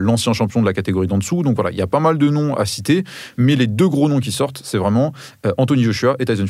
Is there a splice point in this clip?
no; 0 cuts

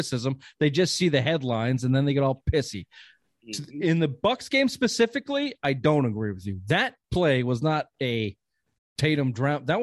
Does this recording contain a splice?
yes; 1 cut; at 7.0 s

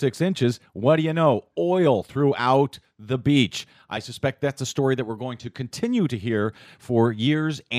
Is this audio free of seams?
yes; 0 cuts

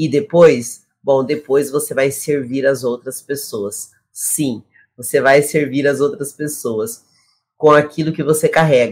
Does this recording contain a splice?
no; 0 cuts

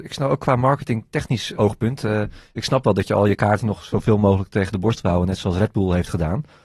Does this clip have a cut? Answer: yes; 1 cut; at 1.5 s

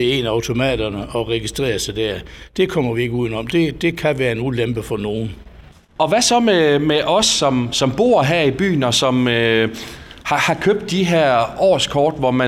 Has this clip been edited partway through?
no; 0 cuts

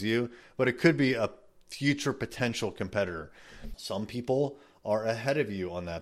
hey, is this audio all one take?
no; 1 cut; at 3.7 s

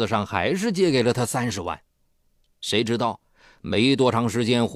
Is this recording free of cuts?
yes; 0 cuts

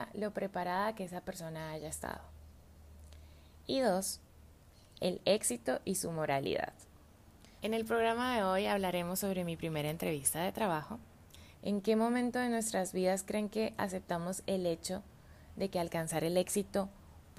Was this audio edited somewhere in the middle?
yes; 2 cuts; at 7.6 s, 11.6 s

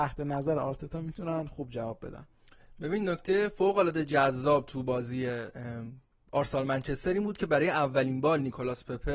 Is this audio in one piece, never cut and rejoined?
yes; 0 cuts

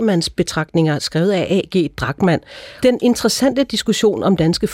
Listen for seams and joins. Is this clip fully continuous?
no; 1 cut; at 2.8 s

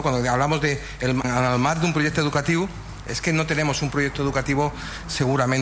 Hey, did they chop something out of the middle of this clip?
yes; 1 cut; at 1.2 s

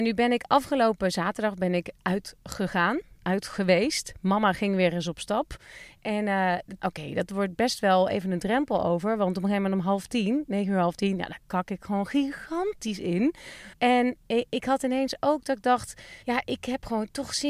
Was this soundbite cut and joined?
yes; 3 cuts; at 6.8 s, 13.7 s, 16.2 s

